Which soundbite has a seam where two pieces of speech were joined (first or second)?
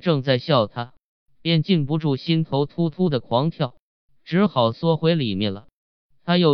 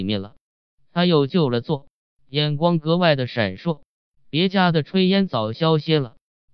second